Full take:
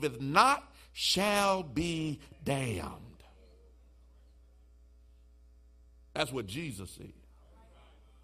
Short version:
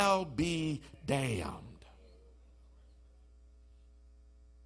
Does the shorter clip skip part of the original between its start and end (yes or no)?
no